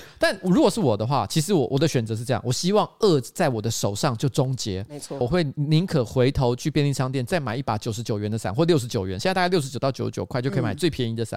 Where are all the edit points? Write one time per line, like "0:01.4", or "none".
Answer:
0:05.2